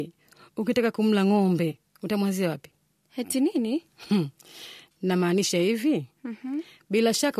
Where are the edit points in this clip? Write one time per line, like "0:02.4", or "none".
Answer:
none